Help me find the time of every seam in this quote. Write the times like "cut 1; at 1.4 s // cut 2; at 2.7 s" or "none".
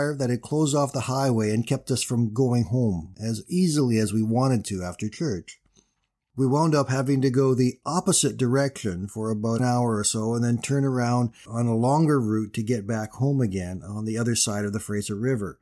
none